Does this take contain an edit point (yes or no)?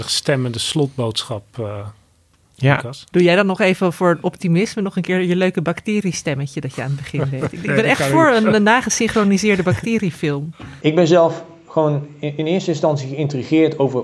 yes